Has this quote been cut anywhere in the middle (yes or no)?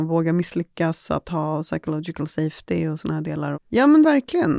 yes